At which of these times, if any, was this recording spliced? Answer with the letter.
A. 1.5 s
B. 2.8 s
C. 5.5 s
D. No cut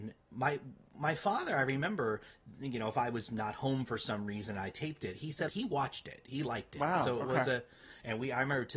C